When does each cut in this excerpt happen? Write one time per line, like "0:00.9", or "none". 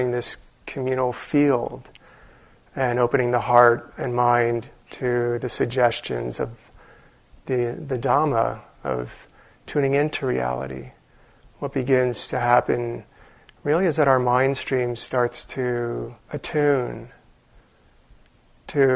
0:16.2